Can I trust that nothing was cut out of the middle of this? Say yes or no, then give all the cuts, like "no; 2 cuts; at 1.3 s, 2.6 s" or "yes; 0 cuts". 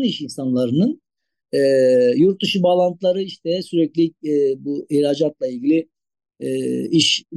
yes; 0 cuts